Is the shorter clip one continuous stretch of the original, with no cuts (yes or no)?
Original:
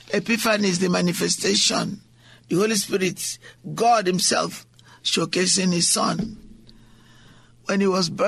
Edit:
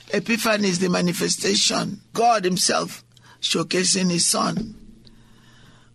no